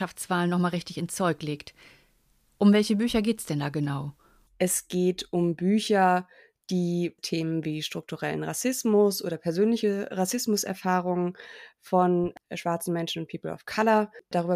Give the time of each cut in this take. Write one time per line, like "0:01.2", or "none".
0:04.5